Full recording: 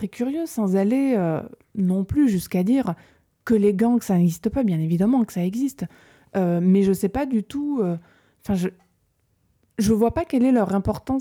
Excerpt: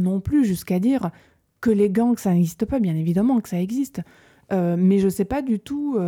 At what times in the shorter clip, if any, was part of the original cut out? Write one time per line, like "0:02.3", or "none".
none